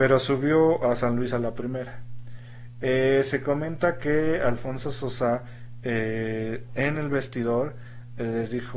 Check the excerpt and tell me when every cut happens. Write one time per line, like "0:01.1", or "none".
none